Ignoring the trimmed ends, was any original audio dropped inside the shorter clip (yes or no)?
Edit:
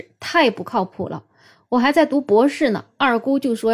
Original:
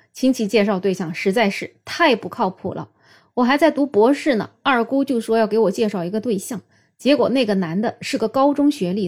no